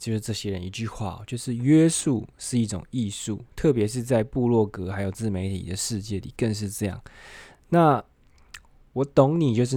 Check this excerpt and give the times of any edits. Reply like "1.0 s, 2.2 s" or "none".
none